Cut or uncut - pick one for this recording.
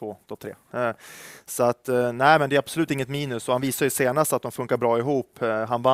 uncut